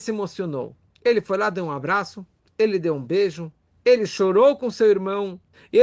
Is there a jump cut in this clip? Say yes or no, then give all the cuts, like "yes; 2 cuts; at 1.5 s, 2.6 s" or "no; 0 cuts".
no; 0 cuts